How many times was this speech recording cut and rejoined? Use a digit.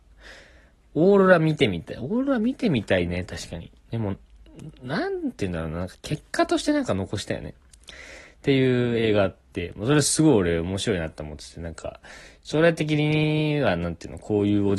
1